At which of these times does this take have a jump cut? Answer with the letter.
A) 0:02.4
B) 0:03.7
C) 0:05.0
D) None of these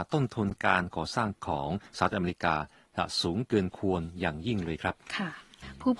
C